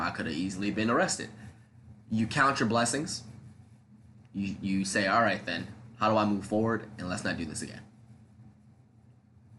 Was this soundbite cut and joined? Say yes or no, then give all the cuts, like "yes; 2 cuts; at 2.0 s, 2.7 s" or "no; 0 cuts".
yes; 2 cuts; at 2.0 s, 4.2 s